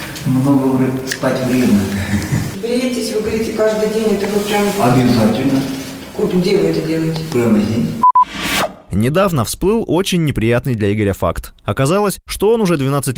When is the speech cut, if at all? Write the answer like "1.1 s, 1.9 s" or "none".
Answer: none